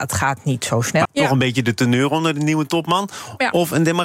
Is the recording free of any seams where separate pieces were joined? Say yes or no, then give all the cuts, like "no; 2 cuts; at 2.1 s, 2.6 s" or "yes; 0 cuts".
no; 1 cut; at 1.0 s